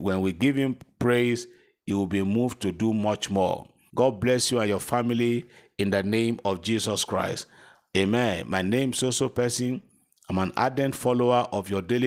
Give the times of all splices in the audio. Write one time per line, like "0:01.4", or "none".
0:03.9